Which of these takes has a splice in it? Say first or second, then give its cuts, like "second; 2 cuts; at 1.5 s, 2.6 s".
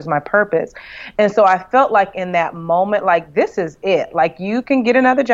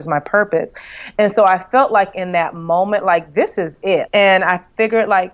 second; 1 cut; at 4.1 s